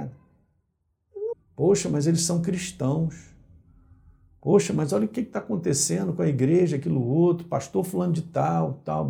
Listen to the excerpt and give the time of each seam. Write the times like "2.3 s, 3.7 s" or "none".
1.3 s